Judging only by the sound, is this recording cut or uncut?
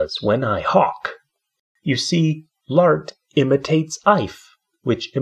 uncut